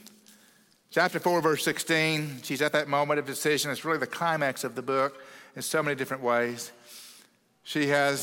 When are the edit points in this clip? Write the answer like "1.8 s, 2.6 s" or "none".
none